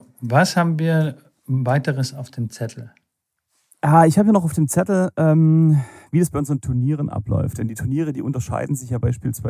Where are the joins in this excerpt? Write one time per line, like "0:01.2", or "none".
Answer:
none